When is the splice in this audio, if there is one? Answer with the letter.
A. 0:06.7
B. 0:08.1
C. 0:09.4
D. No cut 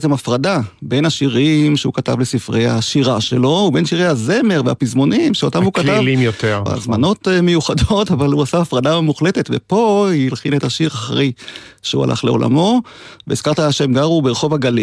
A